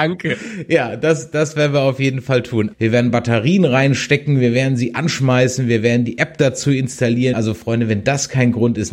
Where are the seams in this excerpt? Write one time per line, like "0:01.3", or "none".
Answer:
0:02.7
0:07.3